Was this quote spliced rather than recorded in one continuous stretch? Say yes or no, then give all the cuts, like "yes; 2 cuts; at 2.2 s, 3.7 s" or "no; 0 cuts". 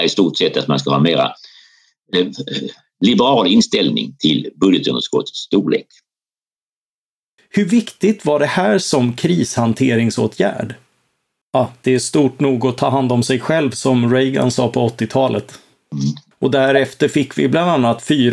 yes; 3 cuts; at 7.4 s, 11.4 s, 16.3 s